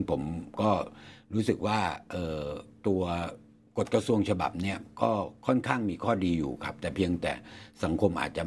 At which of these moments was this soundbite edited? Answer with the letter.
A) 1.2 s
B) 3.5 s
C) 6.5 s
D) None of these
D